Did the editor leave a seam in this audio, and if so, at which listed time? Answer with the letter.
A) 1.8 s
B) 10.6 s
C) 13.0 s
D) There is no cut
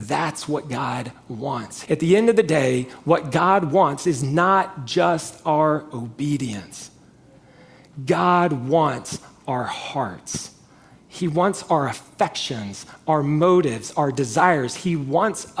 A